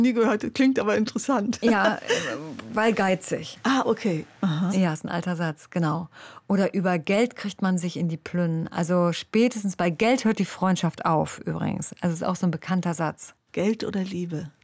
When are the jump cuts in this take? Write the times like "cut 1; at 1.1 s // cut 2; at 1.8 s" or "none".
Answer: cut 1; at 4.7 s